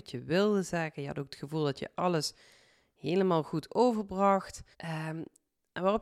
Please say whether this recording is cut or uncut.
cut